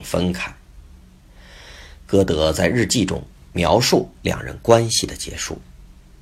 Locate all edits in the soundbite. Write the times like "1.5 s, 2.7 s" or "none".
2.0 s